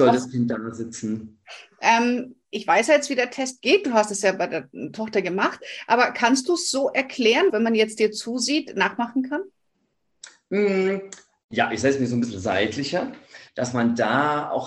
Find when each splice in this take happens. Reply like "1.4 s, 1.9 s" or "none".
7.5 s, 13.5 s